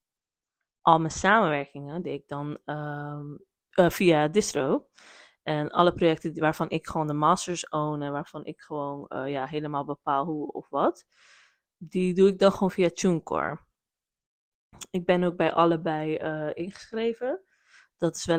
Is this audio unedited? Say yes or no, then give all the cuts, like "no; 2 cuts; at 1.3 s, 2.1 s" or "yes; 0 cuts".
no; 1 cut; at 3.7 s